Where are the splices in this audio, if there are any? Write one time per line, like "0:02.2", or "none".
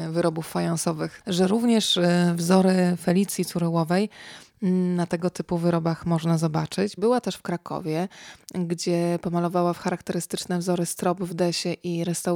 0:01.2
0:07.0